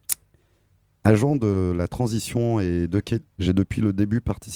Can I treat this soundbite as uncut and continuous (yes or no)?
no